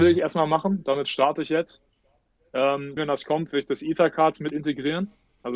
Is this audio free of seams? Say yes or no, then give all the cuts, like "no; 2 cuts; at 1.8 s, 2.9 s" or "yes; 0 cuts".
no; 1 cut; at 3.0 s